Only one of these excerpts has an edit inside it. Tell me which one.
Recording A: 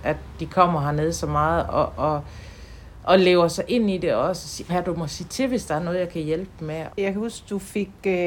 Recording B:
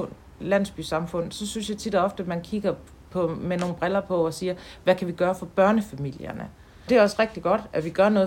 A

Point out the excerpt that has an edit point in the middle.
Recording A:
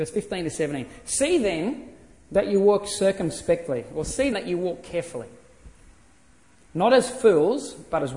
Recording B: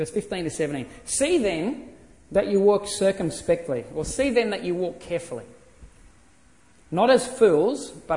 A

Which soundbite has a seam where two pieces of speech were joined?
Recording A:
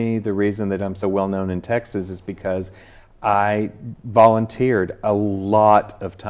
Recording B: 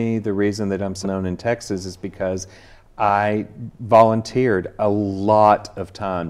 B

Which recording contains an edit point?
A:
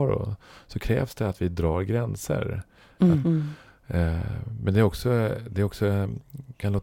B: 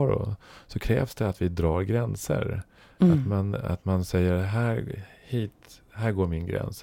A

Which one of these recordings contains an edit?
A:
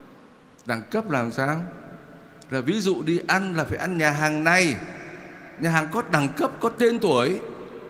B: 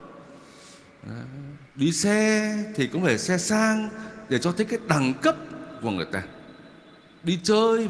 B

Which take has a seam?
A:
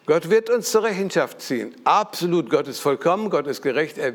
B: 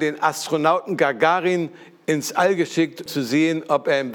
B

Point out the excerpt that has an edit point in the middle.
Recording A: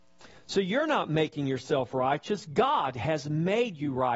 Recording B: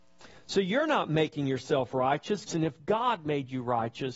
B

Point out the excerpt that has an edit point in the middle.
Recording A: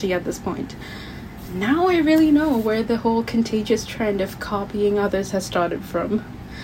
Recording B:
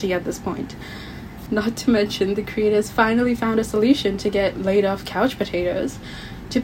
B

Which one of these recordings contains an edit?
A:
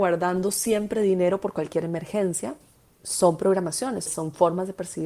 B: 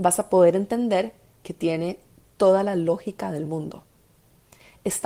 A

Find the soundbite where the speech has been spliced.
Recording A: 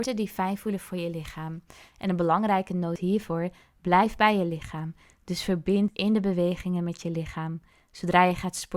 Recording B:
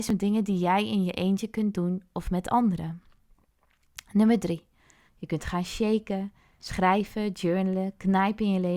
B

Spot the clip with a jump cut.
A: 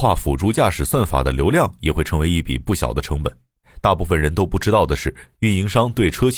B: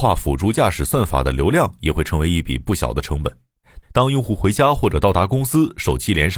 B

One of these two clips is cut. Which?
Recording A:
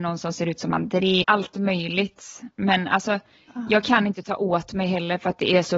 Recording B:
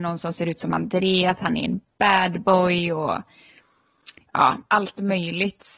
A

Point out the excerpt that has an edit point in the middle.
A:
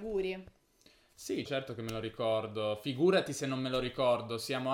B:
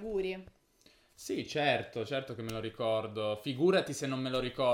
A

